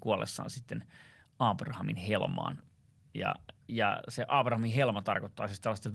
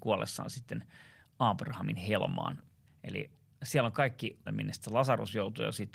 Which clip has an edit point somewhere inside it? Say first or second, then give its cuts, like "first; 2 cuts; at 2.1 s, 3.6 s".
second; 2 cuts; at 2.9 s, 4.5 s